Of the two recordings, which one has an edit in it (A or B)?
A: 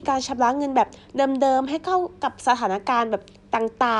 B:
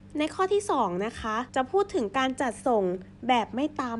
B